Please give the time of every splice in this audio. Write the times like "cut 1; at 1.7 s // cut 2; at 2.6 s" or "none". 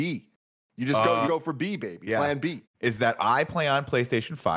cut 1; at 1.2 s // cut 2; at 2.6 s